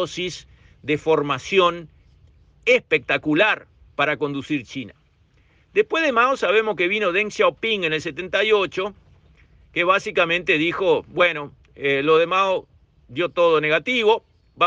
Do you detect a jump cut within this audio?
no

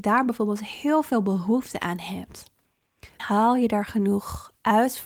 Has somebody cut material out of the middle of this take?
yes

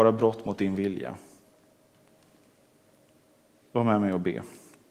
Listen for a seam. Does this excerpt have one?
yes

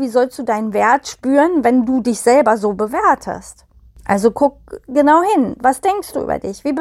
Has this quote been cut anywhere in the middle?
no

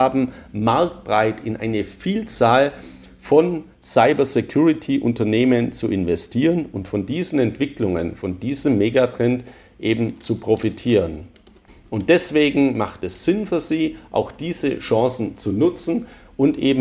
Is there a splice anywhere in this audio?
yes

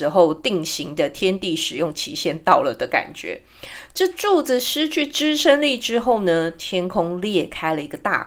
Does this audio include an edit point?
no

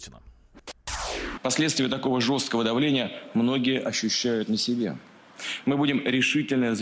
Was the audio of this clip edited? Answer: yes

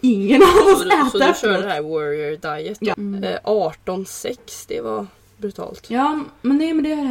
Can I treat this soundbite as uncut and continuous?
no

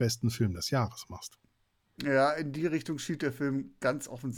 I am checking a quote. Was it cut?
yes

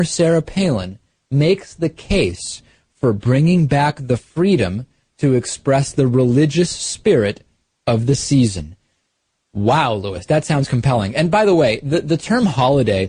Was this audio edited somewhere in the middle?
no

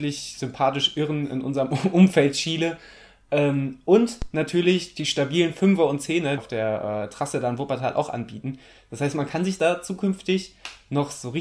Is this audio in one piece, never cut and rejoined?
no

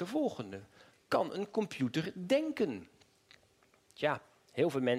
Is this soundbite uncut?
yes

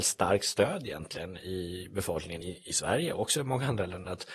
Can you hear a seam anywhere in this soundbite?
no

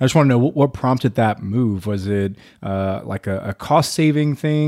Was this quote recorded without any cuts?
yes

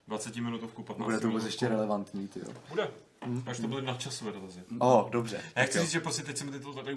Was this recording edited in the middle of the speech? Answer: no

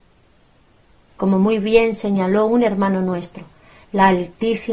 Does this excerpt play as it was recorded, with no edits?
yes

